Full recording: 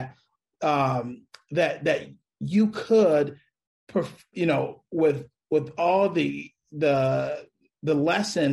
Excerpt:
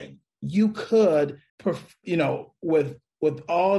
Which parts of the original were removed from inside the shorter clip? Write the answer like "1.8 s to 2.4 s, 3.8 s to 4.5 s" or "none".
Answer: 3.5 s to 3.8 s